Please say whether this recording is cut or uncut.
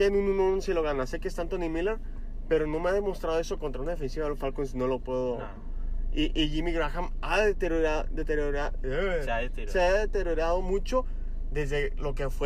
uncut